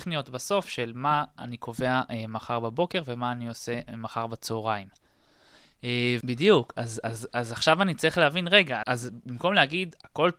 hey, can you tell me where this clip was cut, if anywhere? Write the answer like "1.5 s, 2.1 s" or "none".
6.2 s, 8.8 s